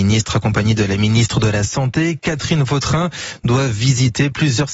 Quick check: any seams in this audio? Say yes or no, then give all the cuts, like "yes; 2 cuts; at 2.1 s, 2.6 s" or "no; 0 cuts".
no; 0 cuts